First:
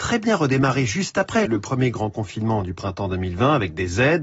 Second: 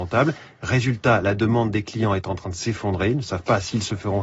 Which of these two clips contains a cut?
first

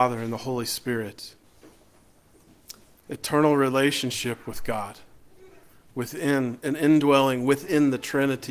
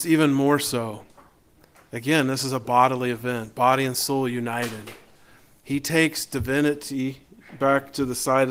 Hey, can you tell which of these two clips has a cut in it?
first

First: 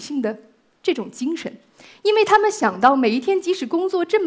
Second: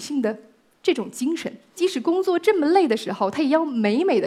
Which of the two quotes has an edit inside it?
second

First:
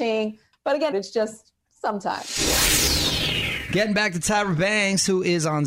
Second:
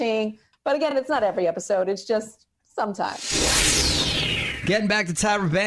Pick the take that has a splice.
first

